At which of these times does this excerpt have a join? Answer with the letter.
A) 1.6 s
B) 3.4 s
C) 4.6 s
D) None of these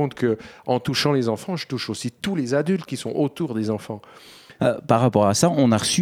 C